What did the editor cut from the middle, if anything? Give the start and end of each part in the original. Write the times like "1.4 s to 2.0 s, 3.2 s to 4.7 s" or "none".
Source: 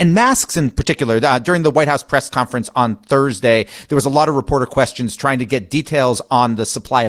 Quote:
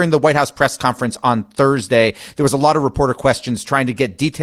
none